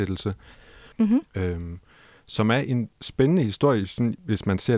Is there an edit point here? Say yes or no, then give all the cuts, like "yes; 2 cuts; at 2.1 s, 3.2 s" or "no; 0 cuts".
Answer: yes; 2 cuts; at 0.9 s, 2.9 s